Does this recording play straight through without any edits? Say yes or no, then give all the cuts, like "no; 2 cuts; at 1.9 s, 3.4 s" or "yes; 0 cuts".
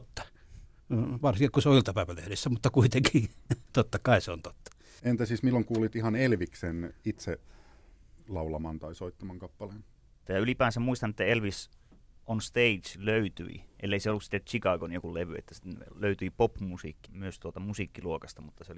no; 3 cuts; at 5.0 s, 10.3 s, 17.1 s